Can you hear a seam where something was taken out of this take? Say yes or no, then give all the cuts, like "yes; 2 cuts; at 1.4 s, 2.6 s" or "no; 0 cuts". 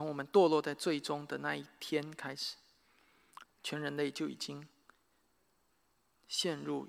yes; 1 cut; at 3.4 s